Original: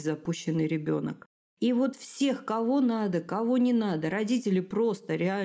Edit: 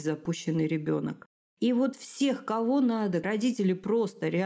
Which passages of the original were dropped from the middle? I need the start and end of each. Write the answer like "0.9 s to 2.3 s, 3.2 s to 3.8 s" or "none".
3.2 s to 4.1 s